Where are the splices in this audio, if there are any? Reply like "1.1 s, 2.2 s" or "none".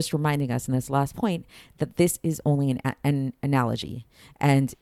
none